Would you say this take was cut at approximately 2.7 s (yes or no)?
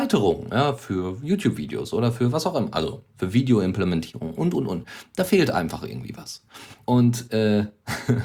no